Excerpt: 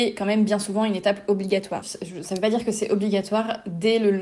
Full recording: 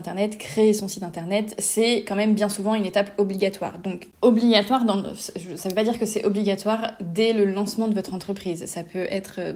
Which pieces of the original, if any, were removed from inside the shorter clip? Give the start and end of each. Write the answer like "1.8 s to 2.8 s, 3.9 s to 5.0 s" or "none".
3.7 s to 5.2 s